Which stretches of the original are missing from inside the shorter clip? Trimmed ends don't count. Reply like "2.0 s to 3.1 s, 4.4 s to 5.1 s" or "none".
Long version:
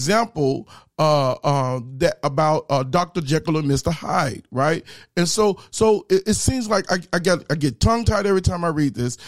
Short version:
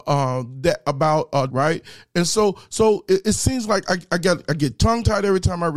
2.8 s to 4.5 s